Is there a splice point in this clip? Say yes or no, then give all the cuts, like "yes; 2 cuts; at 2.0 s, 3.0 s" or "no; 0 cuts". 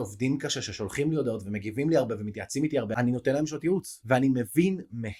no; 0 cuts